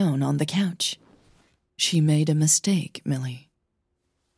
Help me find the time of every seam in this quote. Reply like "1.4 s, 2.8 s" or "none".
1.7 s